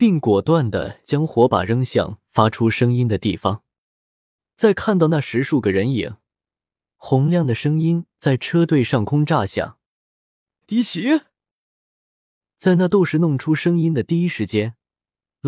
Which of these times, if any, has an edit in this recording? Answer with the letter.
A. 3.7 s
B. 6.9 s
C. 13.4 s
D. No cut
B